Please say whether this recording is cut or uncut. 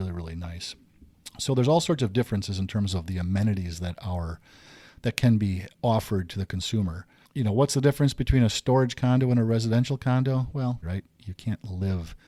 cut